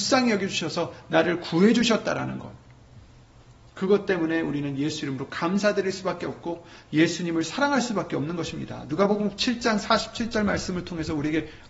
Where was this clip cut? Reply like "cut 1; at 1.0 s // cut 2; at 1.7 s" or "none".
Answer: none